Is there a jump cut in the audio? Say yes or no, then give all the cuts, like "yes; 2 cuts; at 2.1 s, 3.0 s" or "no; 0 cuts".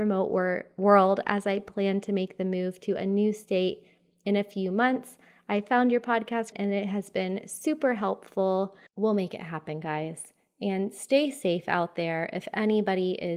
yes; 2 cuts; at 6.5 s, 8.9 s